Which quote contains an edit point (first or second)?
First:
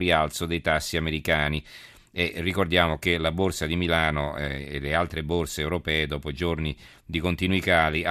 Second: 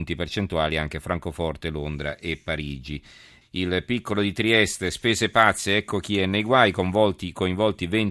second